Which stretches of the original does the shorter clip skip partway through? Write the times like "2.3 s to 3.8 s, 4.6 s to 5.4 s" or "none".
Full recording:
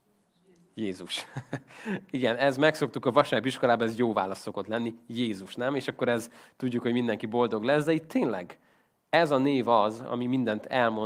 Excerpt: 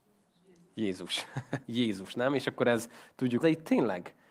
1.6 s to 5.0 s, 6.8 s to 7.8 s